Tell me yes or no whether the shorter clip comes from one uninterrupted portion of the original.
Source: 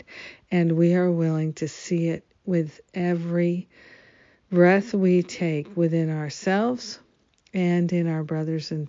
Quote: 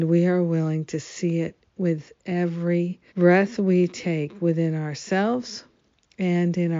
no